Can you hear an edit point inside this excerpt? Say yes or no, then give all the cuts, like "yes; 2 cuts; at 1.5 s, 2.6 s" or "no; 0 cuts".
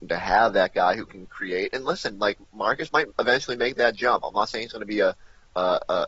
no; 0 cuts